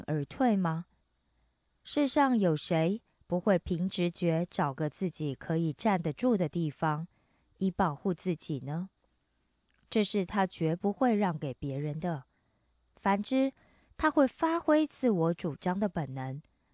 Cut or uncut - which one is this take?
uncut